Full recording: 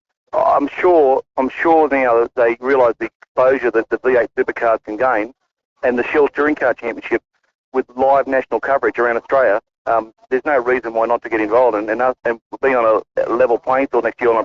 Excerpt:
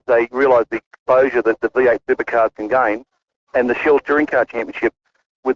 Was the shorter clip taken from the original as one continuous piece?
yes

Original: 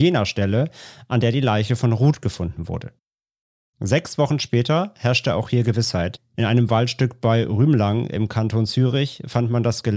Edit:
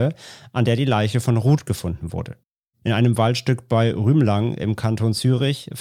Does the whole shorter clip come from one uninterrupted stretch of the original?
no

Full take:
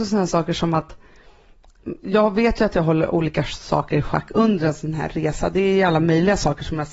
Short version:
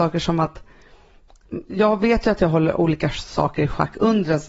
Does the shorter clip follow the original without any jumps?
yes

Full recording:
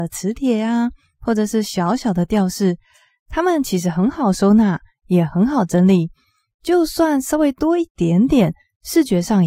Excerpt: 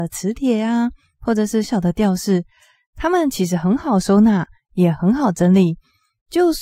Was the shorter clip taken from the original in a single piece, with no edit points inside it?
no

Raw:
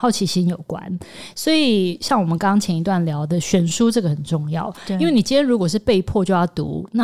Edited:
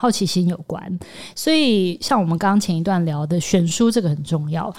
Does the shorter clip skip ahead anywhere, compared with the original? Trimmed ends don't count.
no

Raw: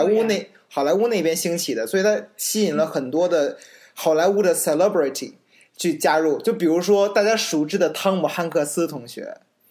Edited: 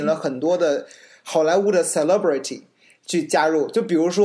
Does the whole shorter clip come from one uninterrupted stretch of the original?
yes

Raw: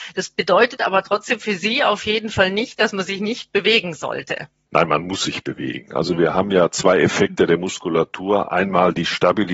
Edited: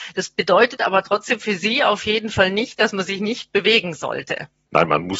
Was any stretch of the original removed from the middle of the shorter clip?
no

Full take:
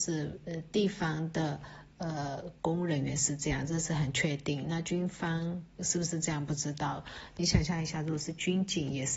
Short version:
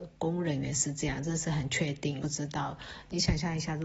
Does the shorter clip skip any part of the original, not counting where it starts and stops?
yes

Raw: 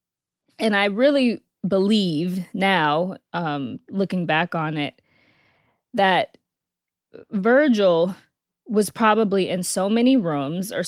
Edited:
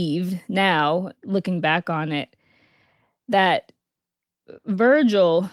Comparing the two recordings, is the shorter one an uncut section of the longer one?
no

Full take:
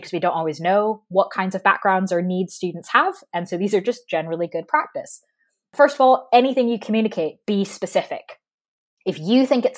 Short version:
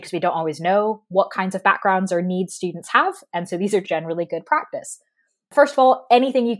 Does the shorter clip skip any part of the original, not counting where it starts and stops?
yes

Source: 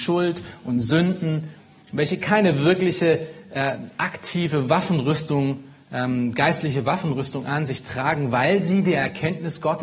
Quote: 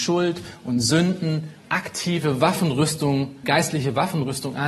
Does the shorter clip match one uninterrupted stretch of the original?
no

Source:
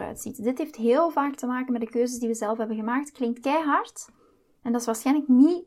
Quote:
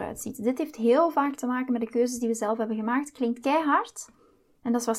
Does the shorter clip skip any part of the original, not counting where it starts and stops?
no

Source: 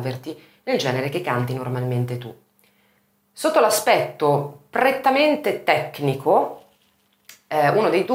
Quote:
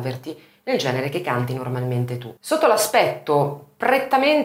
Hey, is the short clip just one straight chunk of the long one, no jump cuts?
no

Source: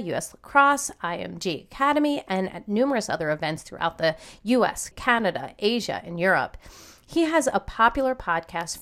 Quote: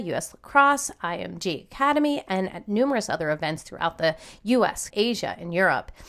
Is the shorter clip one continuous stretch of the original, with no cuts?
no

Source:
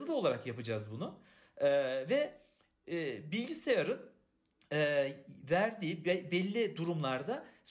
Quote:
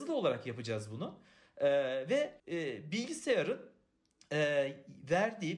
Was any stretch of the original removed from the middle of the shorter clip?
yes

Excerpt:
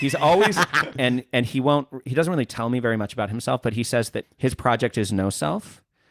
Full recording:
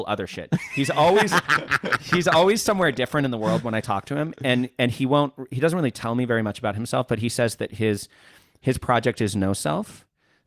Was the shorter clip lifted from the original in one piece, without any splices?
no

